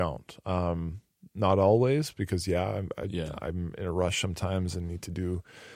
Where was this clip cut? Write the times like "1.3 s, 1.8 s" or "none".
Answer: none